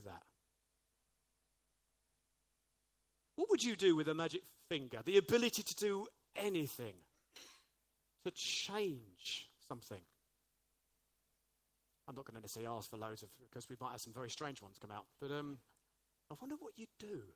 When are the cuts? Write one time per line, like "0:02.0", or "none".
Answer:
none